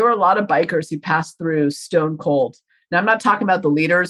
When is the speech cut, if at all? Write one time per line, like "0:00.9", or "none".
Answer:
none